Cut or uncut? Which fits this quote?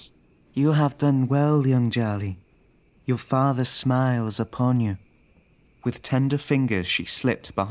uncut